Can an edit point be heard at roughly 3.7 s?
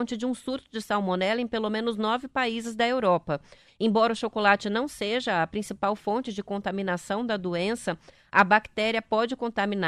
yes; 1 cut; at 3.7 s

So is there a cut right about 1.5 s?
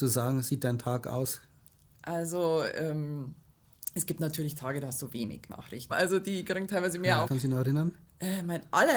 no; 2 cuts; at 5.9 s, 7.2 s

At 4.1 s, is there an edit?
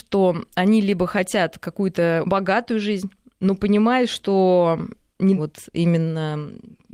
no; 2 cuts; at 2.2 s, 5.4 s

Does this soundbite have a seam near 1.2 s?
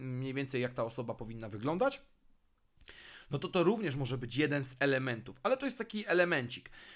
yes; 1 cut; at 1.2 s

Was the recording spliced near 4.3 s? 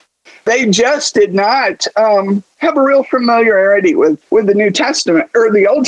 yes; 1 cut; at 4.3 s

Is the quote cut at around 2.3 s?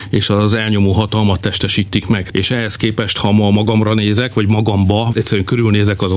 yes; 2 cuts; at 2.3 s, 5.1 s

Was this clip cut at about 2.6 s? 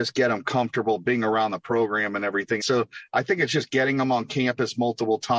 yes; 1 cut; at 2.6 s

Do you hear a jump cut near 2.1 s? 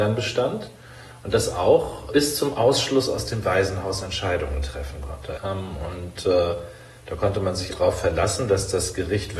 yes; 3 cuts; at 2.1 s, 5.4 s, 7.7 s

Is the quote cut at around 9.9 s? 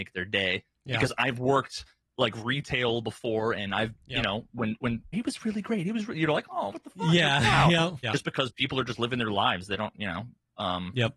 no; 2 cuts; at 5.1 s, 8.0 s

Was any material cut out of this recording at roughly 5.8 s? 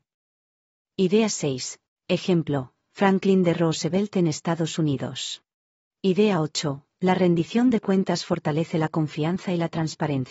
yes; 2 cuts; at 1.9 s, 5.8 s

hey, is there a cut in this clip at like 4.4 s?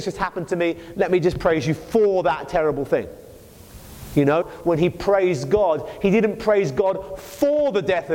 yes; 1 cut; at 4.4 s

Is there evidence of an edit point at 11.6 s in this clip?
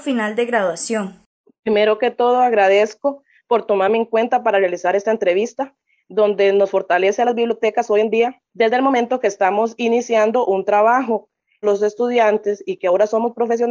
yes; 1 cut; at 11.6 s

